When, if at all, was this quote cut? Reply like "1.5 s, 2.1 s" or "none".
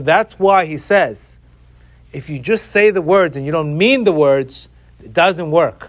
none